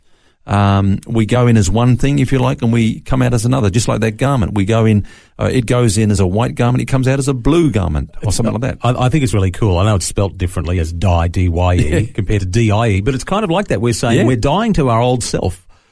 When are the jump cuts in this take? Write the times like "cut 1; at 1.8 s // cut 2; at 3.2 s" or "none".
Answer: none